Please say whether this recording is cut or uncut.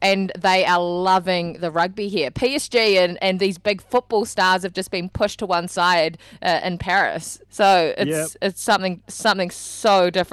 cut